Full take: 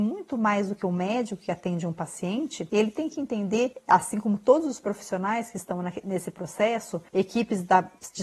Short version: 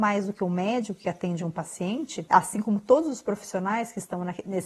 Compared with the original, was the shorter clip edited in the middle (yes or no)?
yes